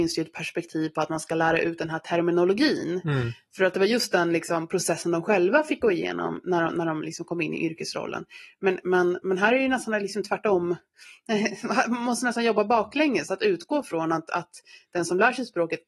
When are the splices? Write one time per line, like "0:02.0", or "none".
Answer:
none